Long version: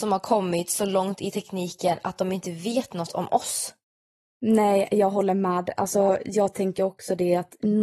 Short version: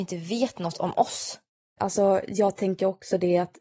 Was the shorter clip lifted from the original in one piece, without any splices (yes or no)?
no